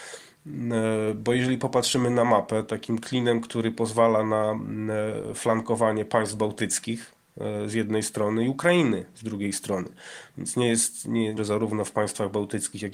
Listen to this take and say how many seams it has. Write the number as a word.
two